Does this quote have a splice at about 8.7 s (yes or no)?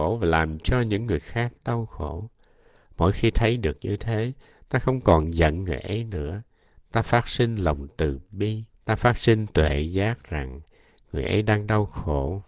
yes